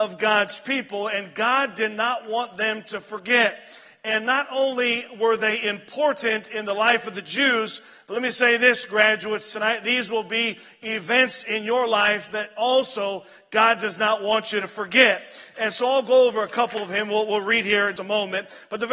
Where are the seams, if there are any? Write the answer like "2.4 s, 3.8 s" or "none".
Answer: 18.0 s

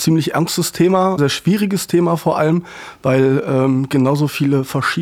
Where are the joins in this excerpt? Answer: 1.2 s

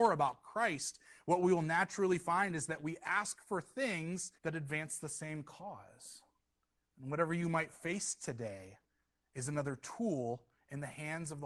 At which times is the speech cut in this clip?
4.4 s

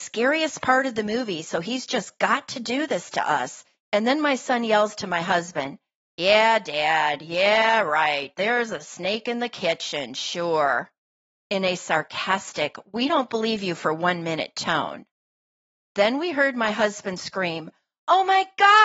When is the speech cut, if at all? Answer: 3.8 s

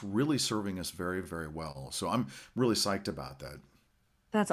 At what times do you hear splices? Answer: none

